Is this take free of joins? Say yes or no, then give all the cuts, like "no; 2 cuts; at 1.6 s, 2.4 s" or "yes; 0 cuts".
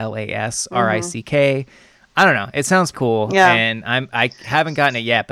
no; 1 cut; at 2.9 s